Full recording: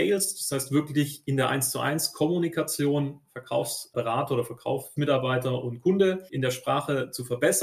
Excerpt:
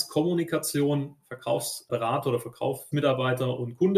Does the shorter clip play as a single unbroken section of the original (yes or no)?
yes